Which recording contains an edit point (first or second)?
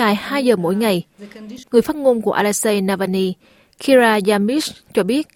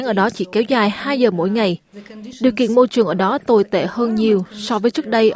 first